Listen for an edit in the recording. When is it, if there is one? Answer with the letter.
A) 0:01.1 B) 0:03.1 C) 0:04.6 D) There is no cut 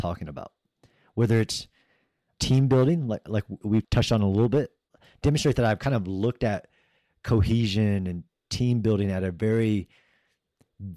D